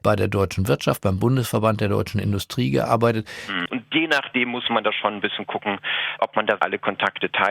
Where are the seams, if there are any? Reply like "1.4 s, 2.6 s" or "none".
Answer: 3.7 s, 6.6 s